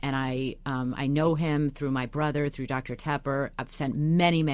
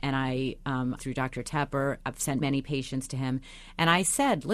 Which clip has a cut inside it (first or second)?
second